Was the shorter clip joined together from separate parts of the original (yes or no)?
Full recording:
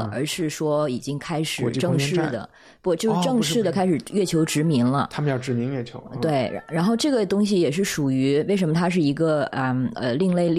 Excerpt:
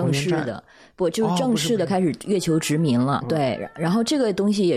yes